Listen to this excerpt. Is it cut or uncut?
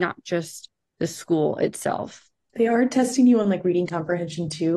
uncut